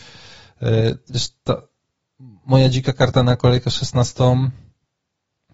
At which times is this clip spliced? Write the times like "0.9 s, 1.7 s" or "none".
none